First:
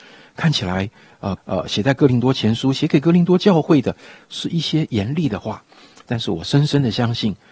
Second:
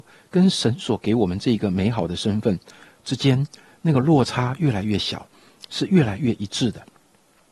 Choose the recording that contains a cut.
first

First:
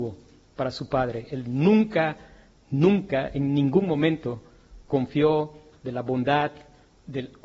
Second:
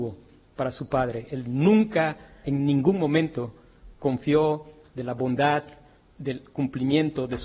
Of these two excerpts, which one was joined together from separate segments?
second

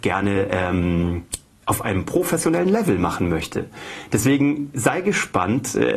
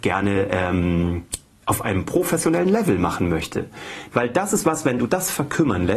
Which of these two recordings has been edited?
second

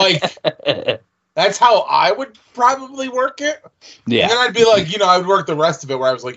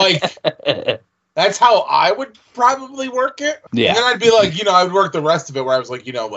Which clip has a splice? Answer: second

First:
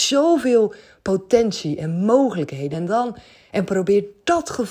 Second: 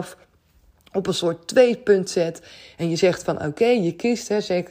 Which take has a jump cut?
first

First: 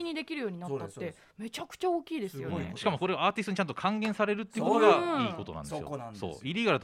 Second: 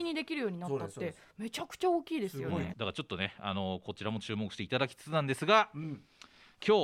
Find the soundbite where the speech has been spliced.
second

